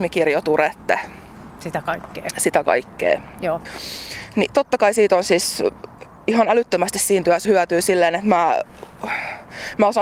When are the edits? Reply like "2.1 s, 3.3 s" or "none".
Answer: 7.4 s